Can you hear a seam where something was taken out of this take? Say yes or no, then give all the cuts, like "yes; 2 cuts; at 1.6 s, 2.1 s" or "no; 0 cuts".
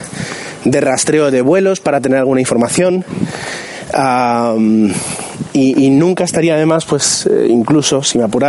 no; 0 cuts